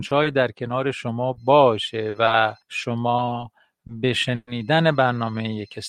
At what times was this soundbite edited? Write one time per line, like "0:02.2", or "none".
0:02.6

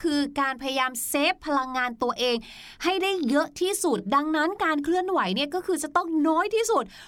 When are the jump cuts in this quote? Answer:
none

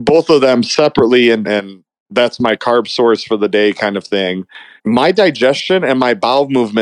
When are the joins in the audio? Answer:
0:01.4
0:04.8

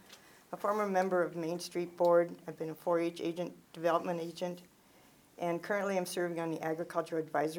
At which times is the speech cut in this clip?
none

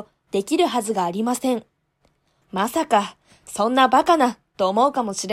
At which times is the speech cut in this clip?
0:02.4

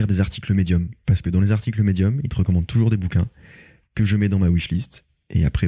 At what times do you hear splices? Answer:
0:01.0

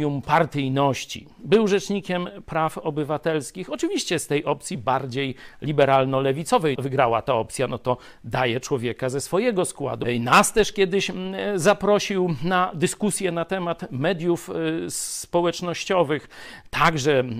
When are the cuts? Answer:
0:06.8
0:10.0

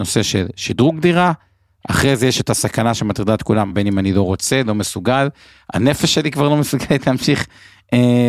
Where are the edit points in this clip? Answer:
0:03.7

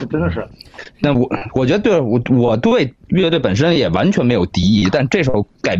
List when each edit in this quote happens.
0:01.1

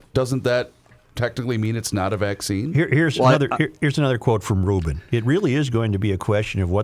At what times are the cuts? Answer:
none

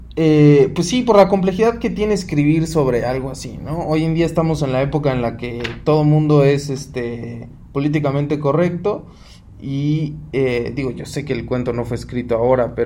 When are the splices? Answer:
none

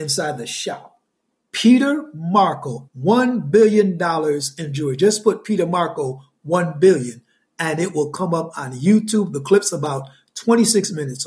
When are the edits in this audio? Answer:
0:01.5
0:02.9

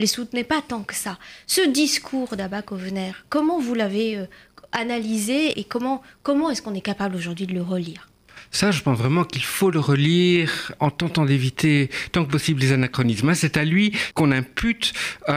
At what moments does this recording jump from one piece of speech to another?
0:05.5

